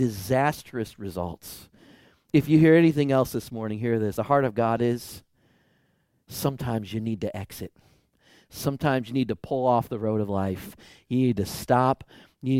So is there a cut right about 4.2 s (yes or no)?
no